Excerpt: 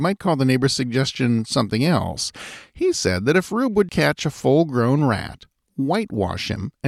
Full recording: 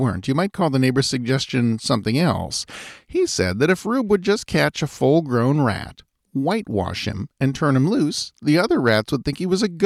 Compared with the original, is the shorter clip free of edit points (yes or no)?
no